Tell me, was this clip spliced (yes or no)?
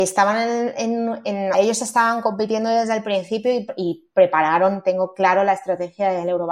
yes